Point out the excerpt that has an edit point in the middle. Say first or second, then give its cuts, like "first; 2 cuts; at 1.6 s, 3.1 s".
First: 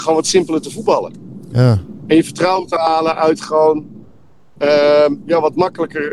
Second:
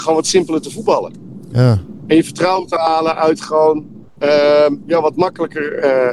second; 1 cut; at 4.1 s